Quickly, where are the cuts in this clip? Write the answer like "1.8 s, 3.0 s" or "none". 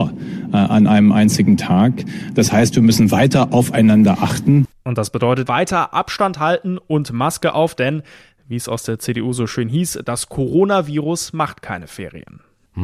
5.5 s